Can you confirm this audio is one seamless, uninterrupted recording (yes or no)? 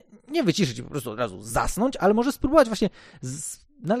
yes